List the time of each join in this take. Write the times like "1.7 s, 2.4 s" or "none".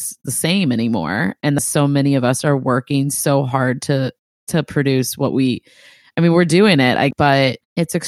none